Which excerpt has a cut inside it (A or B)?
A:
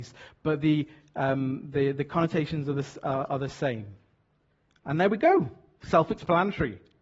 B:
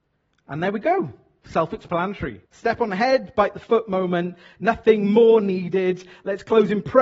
B